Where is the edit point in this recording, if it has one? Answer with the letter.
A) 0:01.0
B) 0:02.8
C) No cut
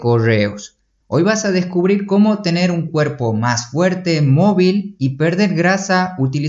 A